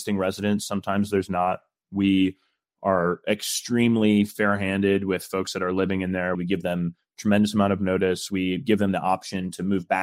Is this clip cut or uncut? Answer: cut